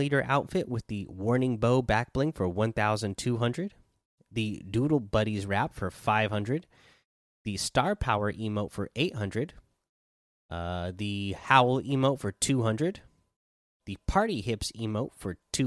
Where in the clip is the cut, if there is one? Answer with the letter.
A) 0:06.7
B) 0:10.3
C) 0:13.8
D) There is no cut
D